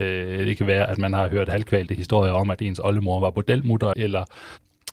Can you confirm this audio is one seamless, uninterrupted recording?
no; 1 cut; at 3.9 s

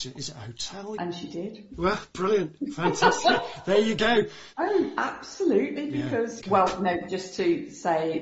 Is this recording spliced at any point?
yes; 3 cuts; at 1.0 s, 4.5 s, 6.4 s

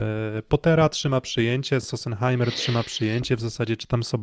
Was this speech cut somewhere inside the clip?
no; 0 cuts

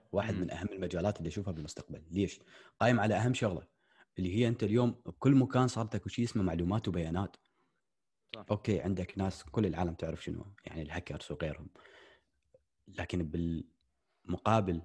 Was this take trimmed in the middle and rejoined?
yes; 1 cut; at 8.5 s

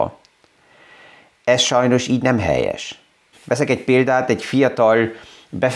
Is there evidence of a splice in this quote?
yes; 1 cut; at 3.3 s

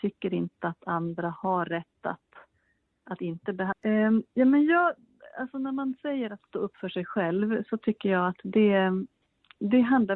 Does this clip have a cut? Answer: yes; 1 cut; at 3.7 s

